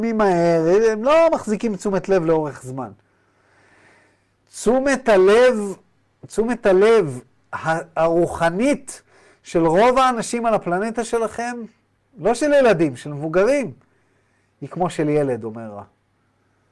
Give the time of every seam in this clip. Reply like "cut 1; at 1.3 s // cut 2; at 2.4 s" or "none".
none